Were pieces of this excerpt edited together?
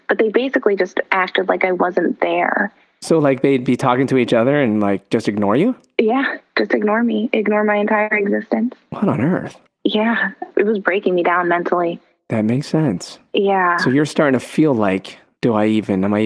no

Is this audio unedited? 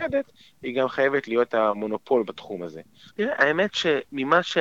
no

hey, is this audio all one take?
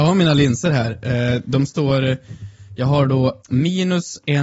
no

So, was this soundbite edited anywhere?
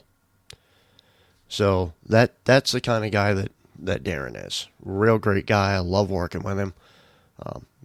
no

